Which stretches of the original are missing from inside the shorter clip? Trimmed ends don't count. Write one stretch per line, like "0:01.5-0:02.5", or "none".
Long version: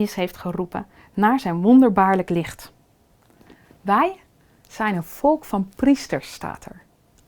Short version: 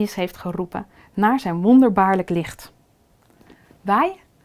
none

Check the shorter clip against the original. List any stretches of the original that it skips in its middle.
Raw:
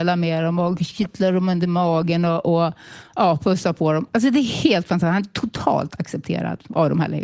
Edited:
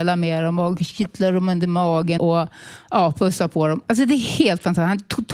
0:02.2-0:02.4

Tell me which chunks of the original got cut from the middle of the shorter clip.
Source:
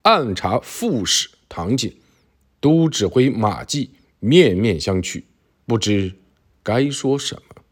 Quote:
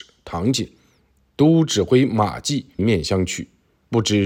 0:04.0-0:04.5

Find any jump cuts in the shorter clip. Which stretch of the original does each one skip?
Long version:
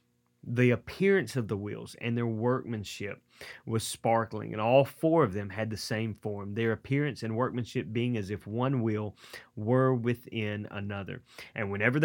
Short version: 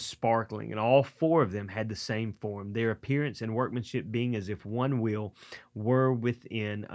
none

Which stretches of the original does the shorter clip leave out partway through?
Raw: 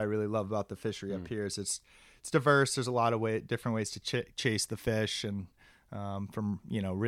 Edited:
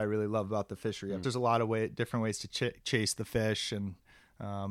0:01.2-0:02.8

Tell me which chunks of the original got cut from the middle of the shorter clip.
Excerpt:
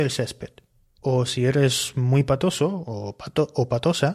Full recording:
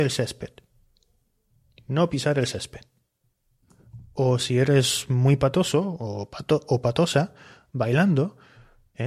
0:01.0-0:04.1

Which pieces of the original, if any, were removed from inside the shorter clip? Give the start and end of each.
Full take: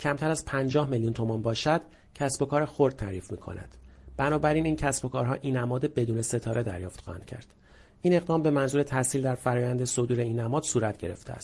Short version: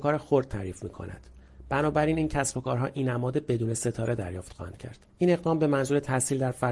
0:07.6-0:07.9

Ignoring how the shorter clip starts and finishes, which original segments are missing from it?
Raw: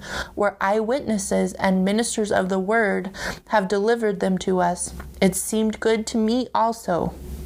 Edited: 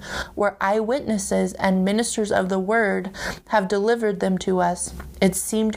none

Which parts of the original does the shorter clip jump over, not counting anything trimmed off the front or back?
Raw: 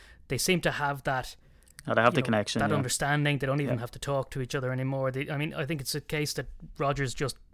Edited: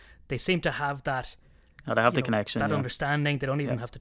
none

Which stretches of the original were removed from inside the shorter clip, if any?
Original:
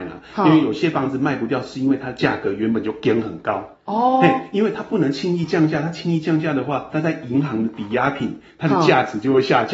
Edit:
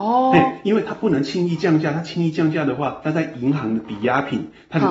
none

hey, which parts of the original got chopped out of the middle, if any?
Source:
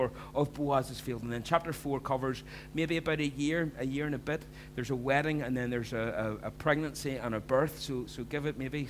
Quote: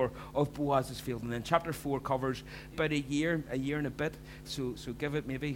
0:02.7-0:03.0
0:04.7-0:07.8

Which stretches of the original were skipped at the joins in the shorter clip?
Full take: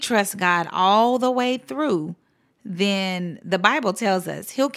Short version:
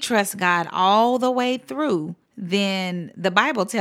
0:02.2-0:02.5

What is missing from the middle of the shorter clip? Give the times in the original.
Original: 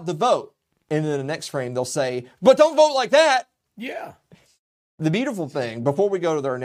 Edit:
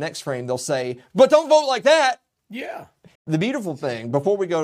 0:04.4-0:04.9

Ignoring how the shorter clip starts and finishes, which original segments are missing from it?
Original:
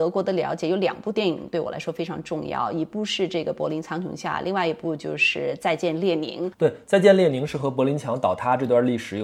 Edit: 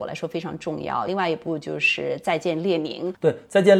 0:02.7-0:04.4

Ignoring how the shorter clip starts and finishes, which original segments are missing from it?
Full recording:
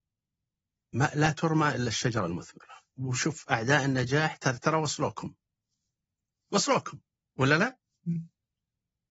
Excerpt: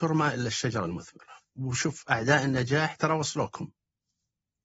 0:04.4-0:04.6

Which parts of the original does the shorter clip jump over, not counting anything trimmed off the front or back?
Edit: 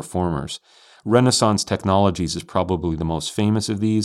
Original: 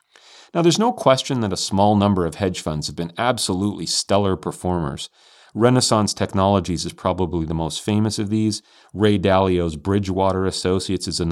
none

